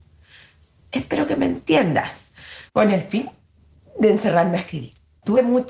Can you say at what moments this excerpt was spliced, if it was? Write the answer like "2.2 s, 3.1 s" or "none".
2.7 s